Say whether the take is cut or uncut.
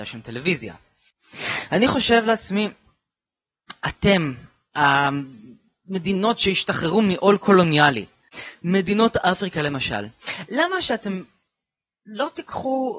uncut